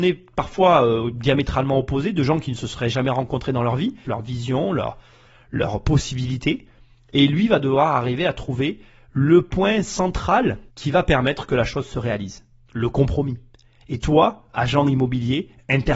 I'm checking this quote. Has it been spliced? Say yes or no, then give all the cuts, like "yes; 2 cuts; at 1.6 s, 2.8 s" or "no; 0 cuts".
yes; 3 cuts; at 4.0 s, 10.7 s, 13.8 s